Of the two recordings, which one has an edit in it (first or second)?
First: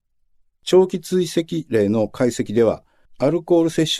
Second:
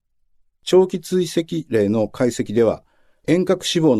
first